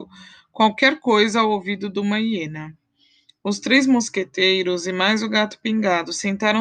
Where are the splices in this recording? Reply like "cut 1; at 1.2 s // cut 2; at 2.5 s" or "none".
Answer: none